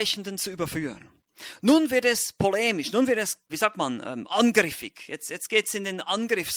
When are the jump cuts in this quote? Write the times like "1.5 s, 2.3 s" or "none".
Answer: 3.5 s